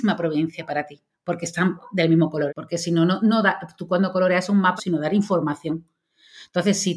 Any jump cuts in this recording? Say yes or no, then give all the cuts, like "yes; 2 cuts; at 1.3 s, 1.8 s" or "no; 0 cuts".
yes; 2 cuts; at 2.5 s, 4.8 s